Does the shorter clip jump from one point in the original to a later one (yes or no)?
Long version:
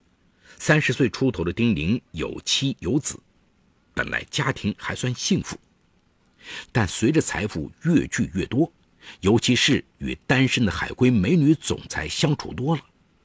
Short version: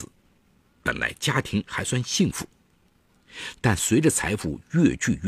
no